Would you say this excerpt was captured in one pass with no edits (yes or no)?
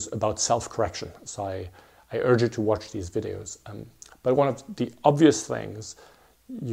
yes